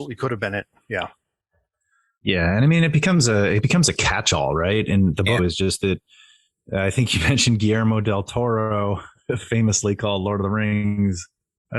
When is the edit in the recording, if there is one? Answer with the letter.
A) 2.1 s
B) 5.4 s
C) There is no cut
B